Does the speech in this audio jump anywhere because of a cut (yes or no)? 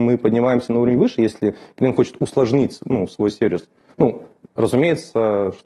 no